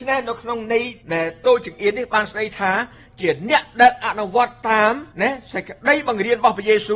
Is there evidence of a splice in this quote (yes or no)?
yes